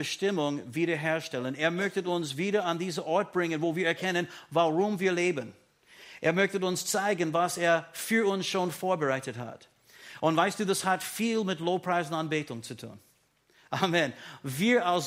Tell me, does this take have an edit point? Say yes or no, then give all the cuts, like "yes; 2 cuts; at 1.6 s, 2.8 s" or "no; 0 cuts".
no; 0 cuts